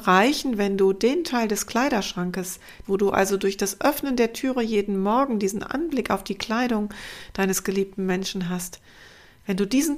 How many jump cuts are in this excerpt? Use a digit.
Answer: 1